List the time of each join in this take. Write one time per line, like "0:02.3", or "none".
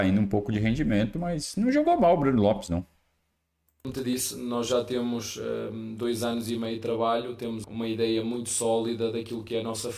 0:07.6